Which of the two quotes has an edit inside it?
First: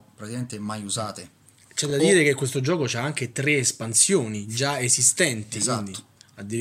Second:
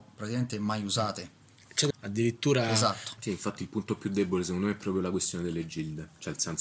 second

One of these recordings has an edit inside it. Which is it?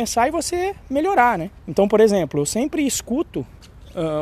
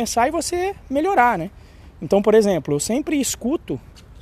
first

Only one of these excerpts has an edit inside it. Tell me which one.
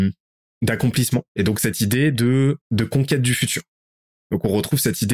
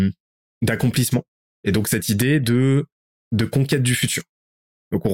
first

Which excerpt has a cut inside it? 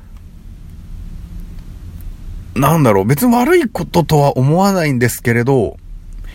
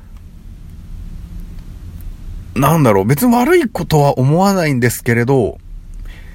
second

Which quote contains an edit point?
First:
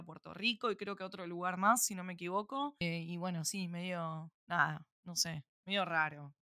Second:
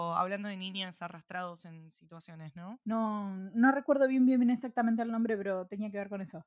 second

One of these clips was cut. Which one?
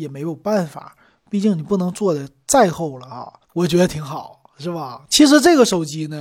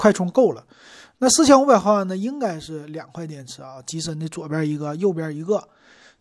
first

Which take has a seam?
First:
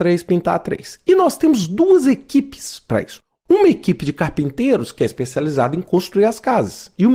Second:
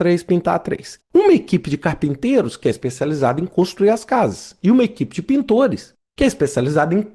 second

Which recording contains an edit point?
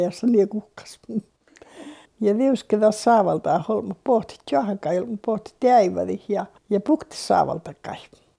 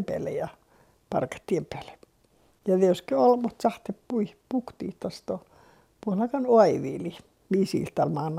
first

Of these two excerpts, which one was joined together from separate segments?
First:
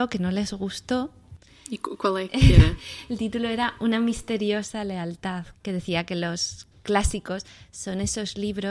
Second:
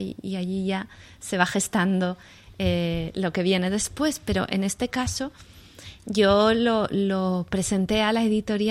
first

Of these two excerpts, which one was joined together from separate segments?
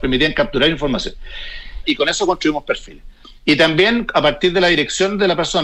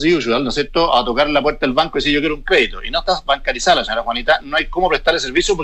first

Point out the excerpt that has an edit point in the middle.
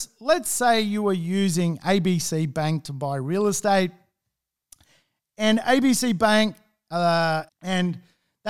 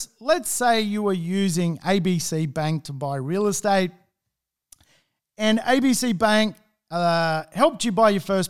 first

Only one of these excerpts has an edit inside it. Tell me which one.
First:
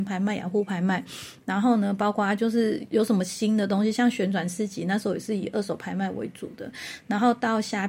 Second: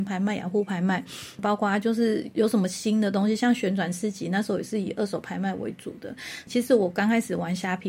second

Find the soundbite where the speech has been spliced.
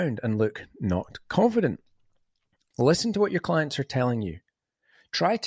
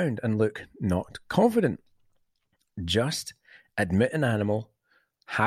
first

